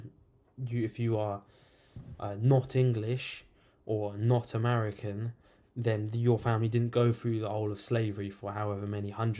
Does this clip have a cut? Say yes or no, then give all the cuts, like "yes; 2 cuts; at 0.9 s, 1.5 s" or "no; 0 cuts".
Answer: no; 0 cuts